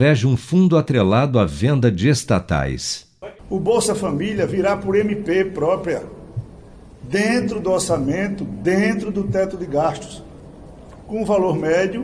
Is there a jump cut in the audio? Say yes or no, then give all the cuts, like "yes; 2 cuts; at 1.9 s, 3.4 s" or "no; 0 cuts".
yes; 1 cut; at 3.4 s